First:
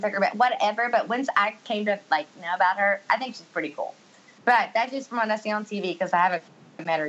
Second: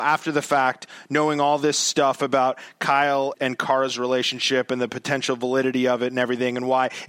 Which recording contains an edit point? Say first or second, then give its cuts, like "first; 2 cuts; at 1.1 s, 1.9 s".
second; 1 cut; at 3.3 s